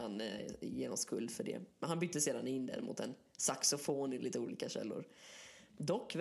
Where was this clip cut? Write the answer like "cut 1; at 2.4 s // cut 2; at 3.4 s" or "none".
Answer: none